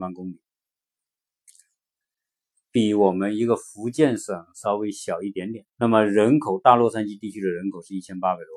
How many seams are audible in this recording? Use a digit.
1